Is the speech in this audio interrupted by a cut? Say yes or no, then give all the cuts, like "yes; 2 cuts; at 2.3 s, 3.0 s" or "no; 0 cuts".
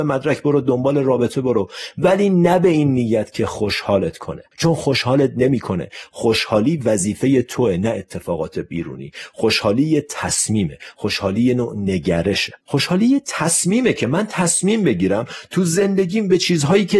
yes; 2 cuts; at 4.5 s, 12.6 s